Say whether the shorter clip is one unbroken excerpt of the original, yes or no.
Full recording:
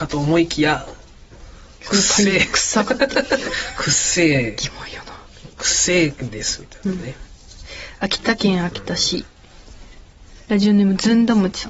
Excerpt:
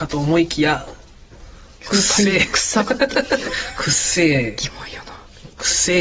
yes